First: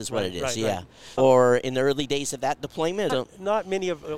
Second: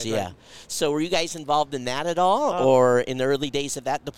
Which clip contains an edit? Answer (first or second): first